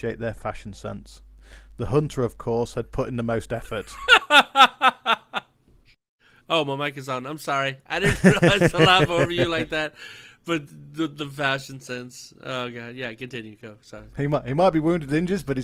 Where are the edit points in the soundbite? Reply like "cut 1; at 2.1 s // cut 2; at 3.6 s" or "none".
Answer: none